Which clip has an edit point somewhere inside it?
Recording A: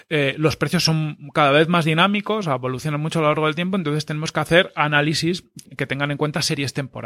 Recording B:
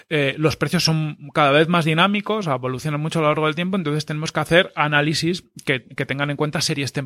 A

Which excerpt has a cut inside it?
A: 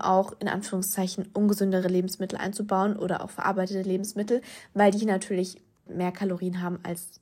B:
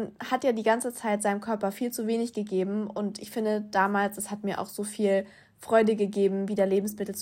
A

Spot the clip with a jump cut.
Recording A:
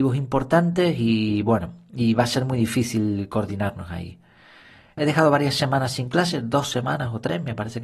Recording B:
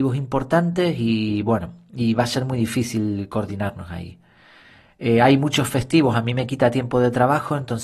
A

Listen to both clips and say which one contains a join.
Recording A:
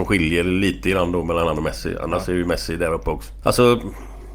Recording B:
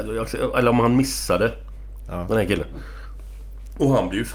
A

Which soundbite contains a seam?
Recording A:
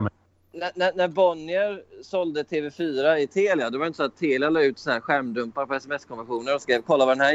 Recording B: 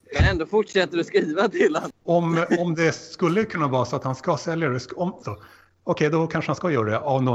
B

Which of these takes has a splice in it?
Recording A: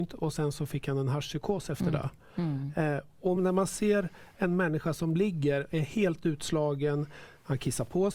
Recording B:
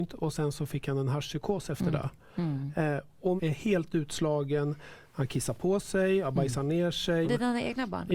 B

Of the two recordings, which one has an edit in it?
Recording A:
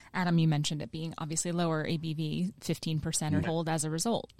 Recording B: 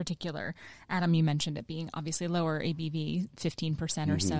A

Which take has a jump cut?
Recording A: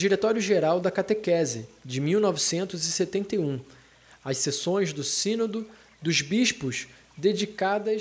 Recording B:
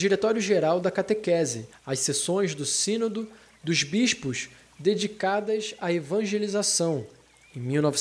B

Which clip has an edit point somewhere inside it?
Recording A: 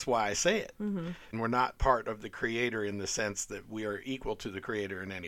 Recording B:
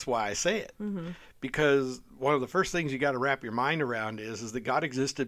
A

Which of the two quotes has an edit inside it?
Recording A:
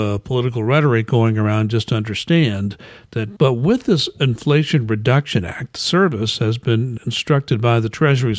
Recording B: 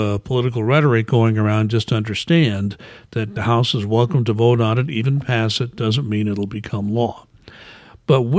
A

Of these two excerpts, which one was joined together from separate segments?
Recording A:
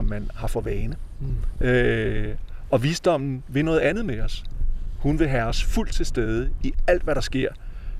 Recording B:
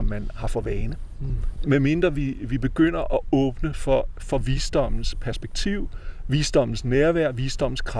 B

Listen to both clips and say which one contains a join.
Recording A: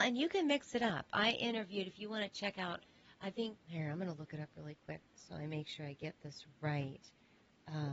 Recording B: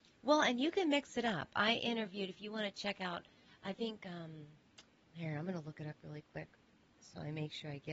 A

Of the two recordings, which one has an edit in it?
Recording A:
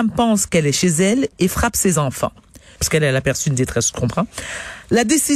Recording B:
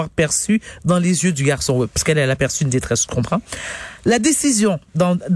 A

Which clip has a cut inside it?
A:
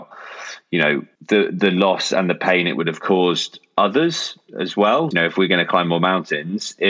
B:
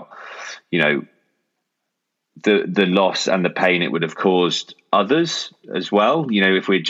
A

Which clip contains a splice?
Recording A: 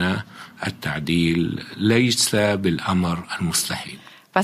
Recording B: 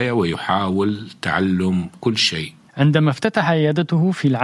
B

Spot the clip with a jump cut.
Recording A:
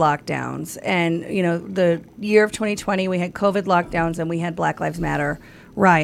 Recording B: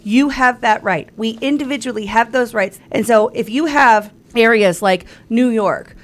B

